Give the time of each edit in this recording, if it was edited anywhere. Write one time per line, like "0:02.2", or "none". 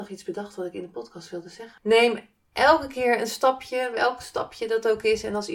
0:01.8